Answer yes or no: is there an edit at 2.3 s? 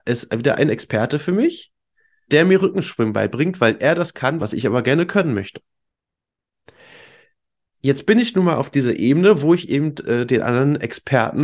yes